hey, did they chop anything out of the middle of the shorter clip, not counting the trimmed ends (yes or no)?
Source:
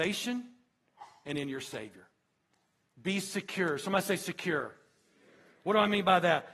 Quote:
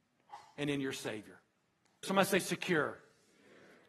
yes